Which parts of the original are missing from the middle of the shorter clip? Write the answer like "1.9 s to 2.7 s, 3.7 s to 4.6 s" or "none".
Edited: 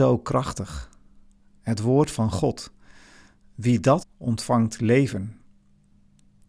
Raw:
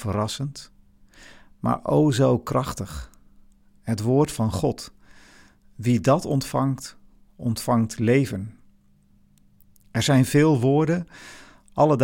6.2 s to 7.2 s